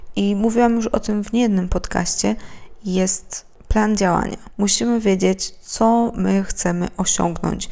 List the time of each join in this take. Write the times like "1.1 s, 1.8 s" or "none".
none

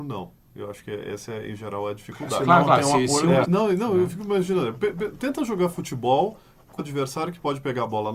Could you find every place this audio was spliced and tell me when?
3.4 s, 6.8 s

